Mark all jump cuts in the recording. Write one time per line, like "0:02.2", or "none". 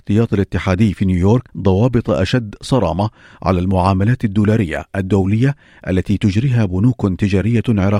0:01.5